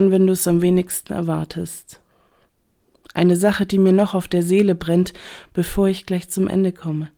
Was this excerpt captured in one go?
yes; 0 cuts

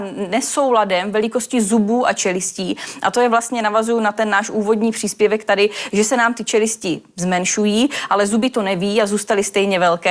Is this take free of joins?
yes; 0 cuts

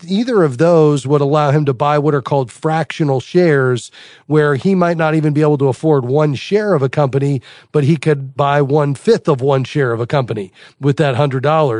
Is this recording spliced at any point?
no; 0 cuts

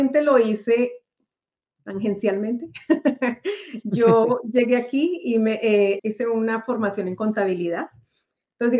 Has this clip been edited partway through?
yes; 1 cut; at 6.0 s

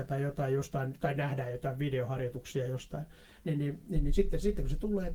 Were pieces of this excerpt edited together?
no; 0 cuts

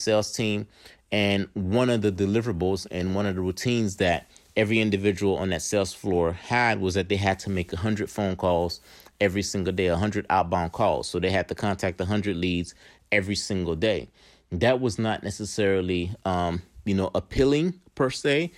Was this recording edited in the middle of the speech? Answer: no; 0 cuts

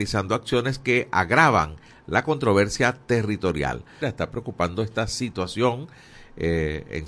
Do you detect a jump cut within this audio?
yes; 1 cut; at 4.0 s

